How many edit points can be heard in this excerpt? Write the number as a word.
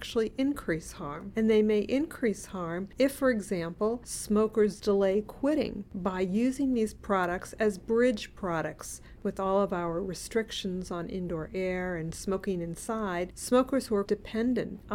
two